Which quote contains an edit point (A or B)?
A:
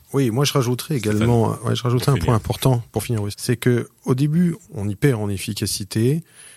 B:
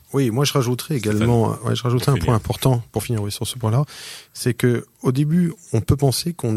A